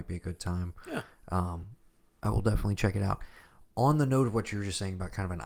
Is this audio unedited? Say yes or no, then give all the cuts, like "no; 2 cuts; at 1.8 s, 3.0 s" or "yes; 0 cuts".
yes; 0 cuts